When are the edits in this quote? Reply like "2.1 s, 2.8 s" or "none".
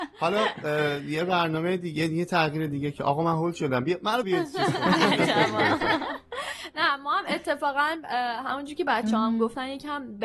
4.2 s